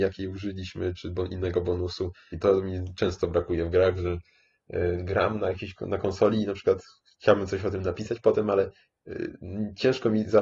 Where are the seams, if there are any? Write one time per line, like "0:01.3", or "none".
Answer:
0:02.3